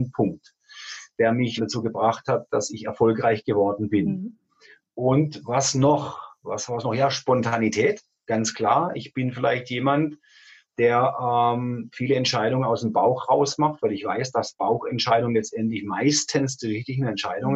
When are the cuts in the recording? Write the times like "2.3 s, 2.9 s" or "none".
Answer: 1.6 s